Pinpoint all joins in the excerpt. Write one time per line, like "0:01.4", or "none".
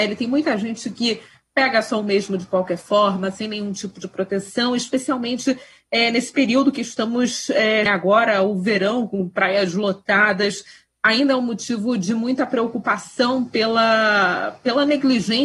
0:07.9

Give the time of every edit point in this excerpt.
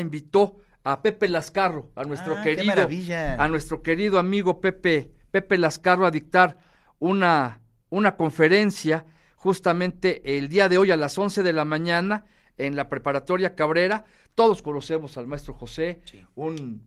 none

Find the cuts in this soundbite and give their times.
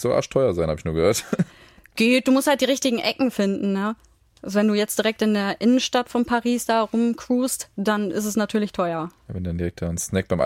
none

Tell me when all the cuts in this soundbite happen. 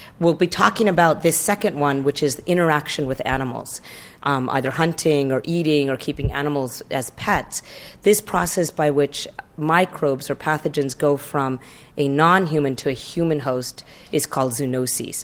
none

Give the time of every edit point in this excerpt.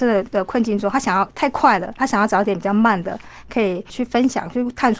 0:02.0

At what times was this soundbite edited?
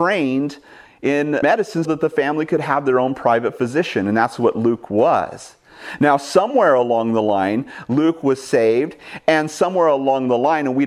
0:01.8

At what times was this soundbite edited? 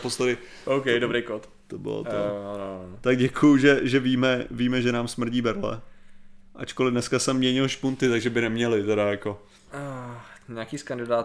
0:06.5

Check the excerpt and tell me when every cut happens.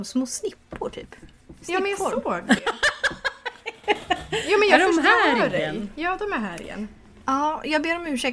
none

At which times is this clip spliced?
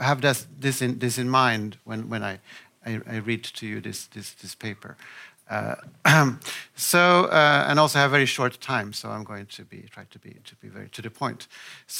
none

